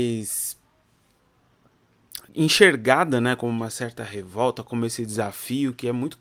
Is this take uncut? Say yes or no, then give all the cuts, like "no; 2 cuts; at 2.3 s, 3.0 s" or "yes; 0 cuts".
no; 1 cut; at 2.3 s